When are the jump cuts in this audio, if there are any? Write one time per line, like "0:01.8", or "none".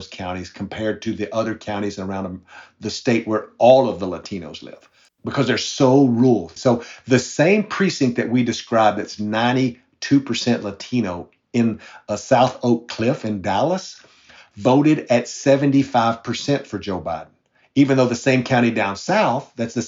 0:05.1
0:06.6